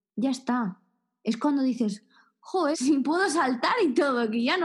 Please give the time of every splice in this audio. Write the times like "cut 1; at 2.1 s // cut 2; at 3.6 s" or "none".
cut 1; at 2.7 s